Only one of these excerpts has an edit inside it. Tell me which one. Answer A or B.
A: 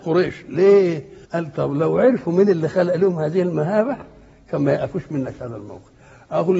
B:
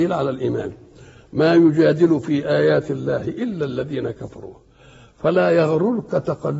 A